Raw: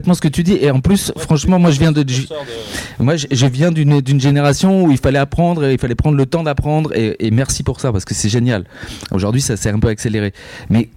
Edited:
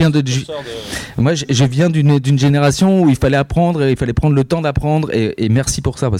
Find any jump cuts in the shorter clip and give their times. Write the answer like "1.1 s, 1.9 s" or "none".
none